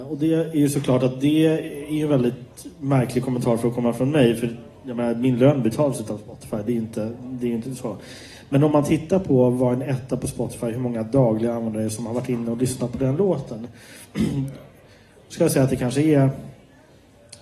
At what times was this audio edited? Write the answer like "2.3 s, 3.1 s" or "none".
none